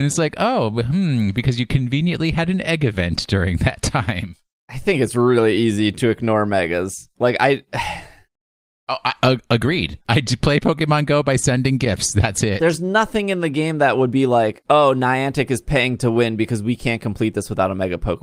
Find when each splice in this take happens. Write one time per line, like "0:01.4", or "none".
0:10.1